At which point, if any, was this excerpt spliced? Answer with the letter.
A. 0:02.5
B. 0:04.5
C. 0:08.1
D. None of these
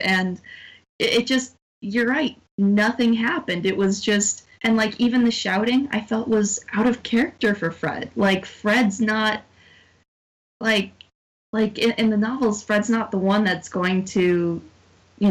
B